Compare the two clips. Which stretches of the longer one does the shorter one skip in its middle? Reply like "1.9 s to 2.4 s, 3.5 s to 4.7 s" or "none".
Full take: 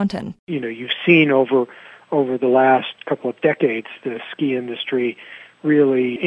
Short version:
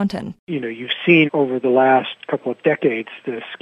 1.3 s to 2.0 s